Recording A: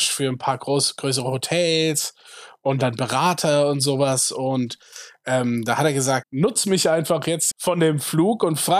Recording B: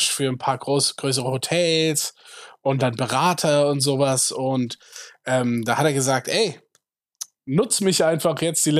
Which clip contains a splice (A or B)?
A